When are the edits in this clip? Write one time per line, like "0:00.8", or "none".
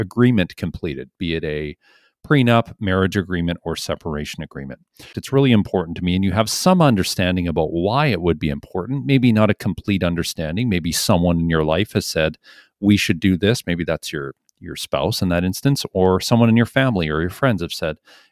0:05.1